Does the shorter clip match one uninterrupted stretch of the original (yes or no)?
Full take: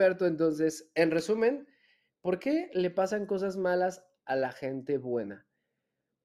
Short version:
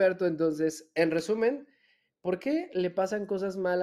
yes